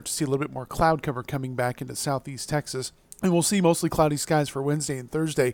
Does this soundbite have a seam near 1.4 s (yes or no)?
no